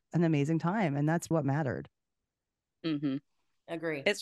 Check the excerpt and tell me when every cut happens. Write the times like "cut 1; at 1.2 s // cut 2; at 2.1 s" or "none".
cut 1; at 1.3 s